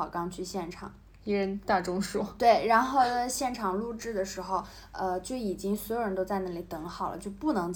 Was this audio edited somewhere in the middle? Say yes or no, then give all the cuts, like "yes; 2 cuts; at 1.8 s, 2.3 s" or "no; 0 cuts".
no; 0 cuts